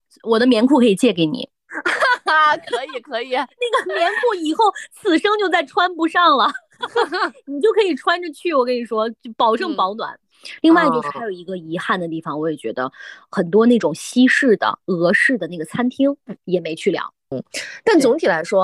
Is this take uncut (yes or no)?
yes